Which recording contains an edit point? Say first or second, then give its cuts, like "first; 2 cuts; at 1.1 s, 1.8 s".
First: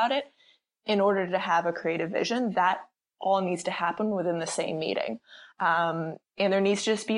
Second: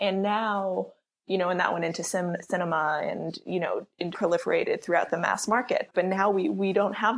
second; 2 cuts; at 4.1 s, 5.9 s